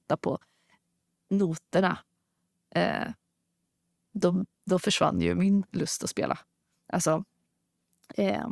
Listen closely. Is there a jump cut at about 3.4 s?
no; 0 cuts

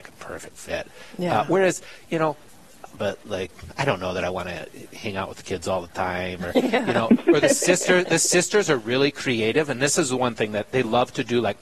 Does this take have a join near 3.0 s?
yes; 1 cut; at 3.0 s

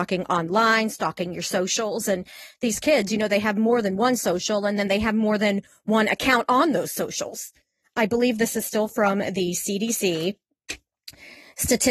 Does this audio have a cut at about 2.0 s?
no; 1 cut; at 7.8 s

